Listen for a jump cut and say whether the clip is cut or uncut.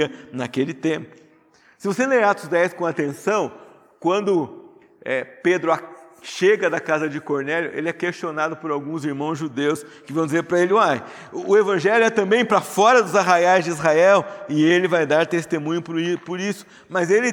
uncut